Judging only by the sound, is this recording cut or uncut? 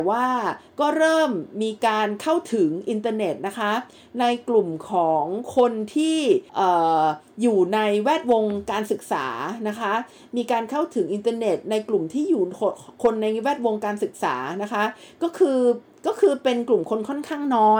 cut